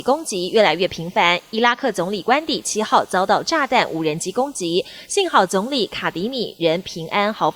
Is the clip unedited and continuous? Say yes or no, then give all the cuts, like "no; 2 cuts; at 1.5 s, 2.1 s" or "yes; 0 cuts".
yes; 0 cuts